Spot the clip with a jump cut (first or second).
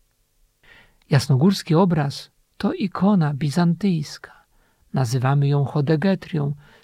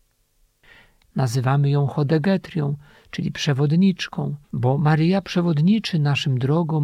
second